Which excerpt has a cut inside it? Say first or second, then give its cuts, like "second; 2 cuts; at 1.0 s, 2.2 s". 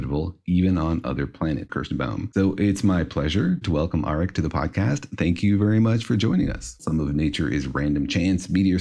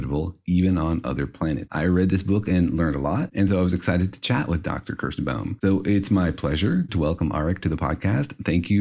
first; 2 cuts; at 1.7 s, 6.8 s